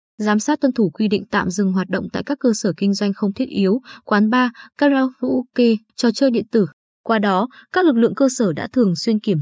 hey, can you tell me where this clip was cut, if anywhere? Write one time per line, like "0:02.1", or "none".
0:05.9